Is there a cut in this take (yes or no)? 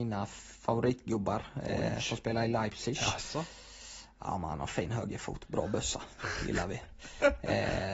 no